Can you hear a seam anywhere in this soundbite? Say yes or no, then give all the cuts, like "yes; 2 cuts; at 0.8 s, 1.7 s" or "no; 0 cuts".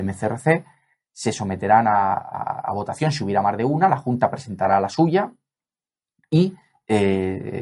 no; 0 cuts